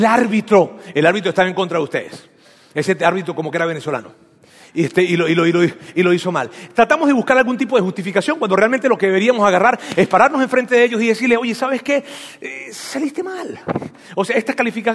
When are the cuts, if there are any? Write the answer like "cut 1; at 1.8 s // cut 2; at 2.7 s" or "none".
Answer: none